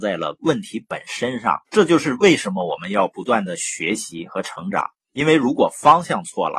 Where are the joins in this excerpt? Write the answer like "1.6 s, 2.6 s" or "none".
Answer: 1.7 s